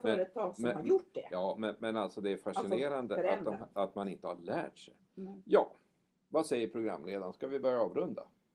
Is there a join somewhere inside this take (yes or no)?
no